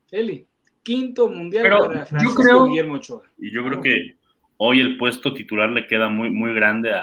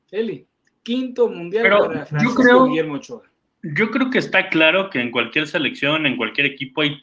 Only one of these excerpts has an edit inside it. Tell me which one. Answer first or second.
first